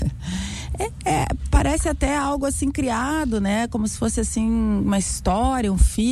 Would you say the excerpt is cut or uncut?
uncut